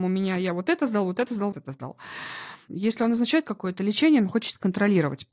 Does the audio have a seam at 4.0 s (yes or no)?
no